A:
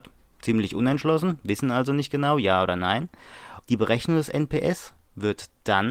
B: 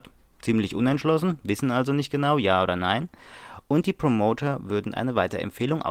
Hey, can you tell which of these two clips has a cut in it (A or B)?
A